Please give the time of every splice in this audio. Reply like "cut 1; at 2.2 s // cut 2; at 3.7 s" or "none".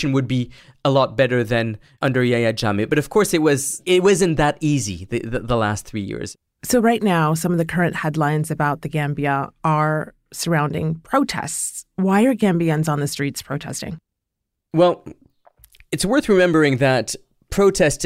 none